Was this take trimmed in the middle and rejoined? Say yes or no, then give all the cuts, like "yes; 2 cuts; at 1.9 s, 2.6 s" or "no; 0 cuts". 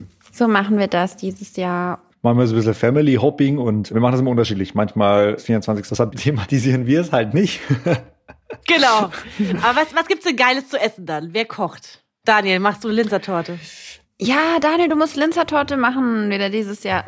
yes; 1 cut; at 5.9 s